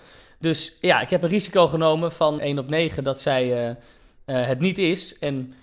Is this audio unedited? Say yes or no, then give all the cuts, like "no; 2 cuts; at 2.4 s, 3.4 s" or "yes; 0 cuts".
no; 1 cut; at 2.4 s